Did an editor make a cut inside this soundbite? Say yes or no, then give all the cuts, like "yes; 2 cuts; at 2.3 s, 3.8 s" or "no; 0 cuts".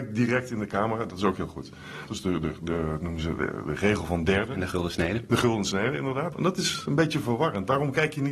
yes; 2 cuts; at 2.1 s, 6.3 s